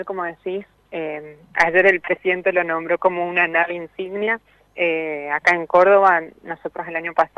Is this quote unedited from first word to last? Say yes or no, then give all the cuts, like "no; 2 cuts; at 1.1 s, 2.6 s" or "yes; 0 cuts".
yes; 0 cuts